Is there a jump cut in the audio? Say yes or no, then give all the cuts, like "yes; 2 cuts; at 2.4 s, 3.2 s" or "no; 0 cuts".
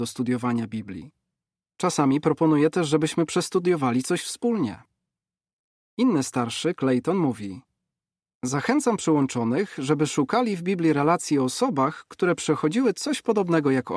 no; 0 cuts